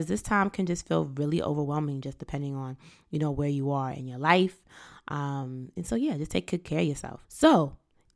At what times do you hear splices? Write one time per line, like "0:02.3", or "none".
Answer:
0:07.2